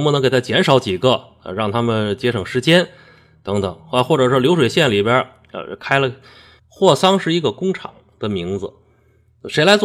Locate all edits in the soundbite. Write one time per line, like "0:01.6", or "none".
0:06.6